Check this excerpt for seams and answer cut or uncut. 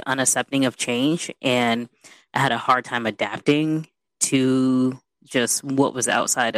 uncut